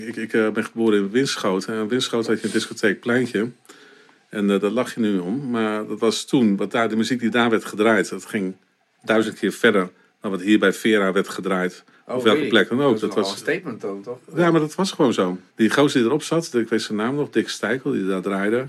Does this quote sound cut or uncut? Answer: cut